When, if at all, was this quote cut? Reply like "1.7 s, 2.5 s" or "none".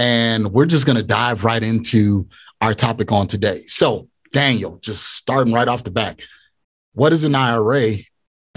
none